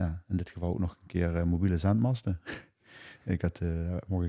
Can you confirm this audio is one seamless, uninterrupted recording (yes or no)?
yes